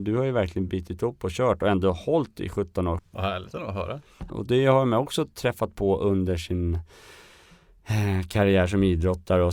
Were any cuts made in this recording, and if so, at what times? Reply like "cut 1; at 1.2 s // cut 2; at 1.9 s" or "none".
cut 1; at 3.0 s // cut 2; at 4.3 s